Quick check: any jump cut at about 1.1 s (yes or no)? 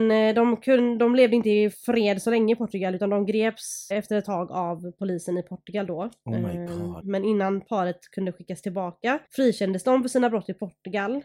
no